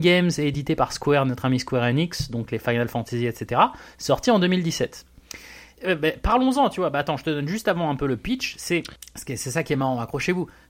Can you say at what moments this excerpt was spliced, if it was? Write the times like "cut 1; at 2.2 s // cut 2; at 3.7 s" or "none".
none